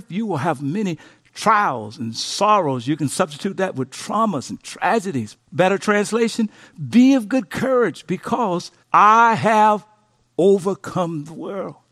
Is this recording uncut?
no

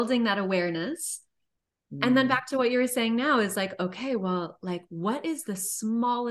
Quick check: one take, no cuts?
yes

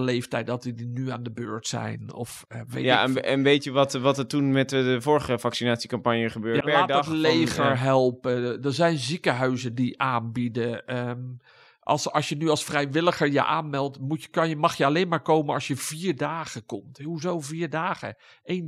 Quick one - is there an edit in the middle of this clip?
yes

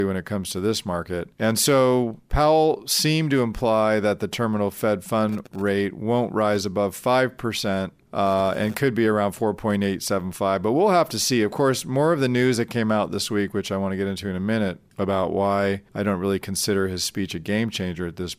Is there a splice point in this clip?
no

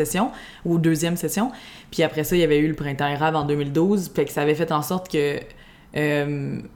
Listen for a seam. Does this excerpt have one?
no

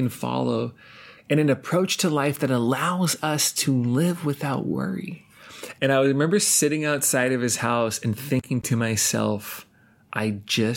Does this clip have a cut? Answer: yes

